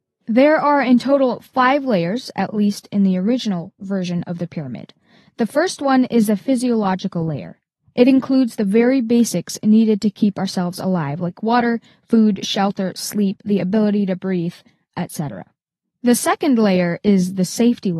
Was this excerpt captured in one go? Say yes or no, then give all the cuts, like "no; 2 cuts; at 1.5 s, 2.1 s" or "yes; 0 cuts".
yes; 0 cuts